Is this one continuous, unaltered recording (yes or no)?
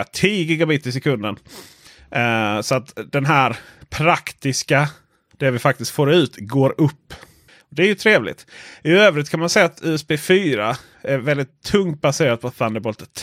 yes